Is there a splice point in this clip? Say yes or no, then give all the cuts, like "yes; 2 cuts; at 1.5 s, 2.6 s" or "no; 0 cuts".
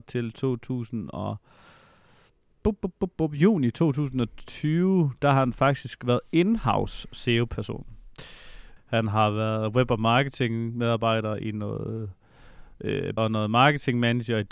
yes; 3 cuts; at 3.1 s, 8.8 s, 13.2 s